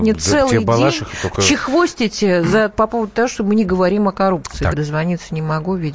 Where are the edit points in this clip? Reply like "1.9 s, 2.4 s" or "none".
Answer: 2.7 s, 4.7 s